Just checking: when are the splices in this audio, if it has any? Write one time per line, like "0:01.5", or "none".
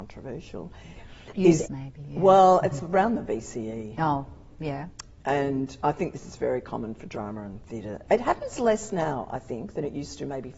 0:01.7